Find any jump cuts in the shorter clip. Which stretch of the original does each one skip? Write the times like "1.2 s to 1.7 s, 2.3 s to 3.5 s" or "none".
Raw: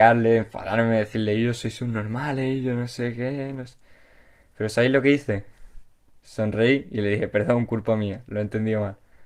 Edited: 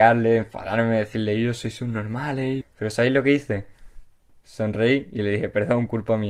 2.6 s to 4.4 s